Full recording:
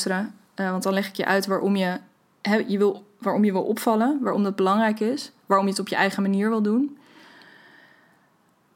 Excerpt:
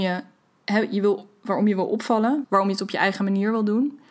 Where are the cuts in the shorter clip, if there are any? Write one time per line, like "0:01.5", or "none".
0:02.4